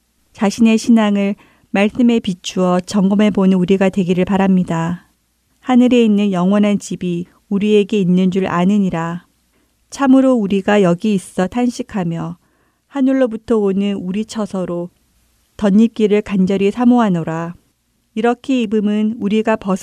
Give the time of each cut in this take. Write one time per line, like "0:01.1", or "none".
0:05.5